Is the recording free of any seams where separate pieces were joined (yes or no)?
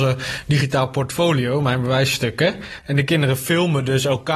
yes